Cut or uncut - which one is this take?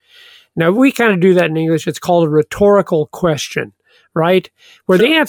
uncut